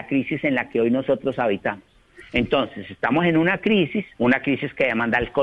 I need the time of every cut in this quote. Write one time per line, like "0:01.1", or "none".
0:04.1